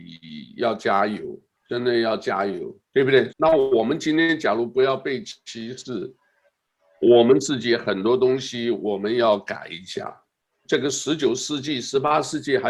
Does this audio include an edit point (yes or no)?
yes